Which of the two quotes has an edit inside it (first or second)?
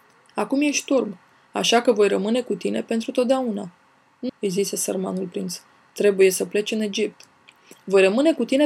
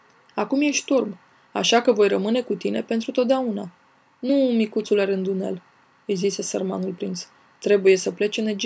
first